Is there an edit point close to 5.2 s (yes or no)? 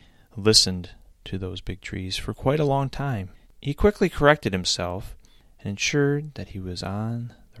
no